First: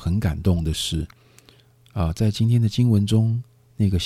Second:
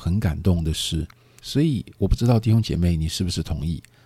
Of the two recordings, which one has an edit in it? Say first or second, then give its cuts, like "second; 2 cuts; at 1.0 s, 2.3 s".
second; 1 cut; at 1.4 s